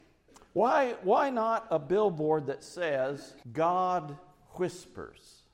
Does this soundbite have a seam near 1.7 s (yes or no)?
yes